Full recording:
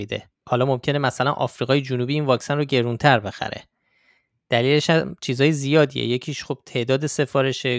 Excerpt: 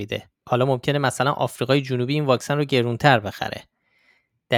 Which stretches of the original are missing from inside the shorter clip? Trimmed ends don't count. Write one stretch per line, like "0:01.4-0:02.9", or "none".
none